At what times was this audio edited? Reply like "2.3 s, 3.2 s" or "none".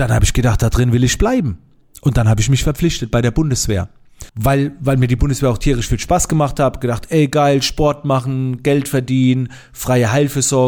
4.3 s